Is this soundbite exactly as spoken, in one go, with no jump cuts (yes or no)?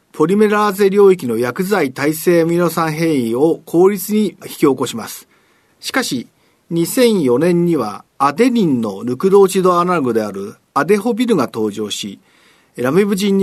no